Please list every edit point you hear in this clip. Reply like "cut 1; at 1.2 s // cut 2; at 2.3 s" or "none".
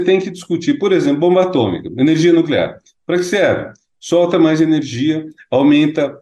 none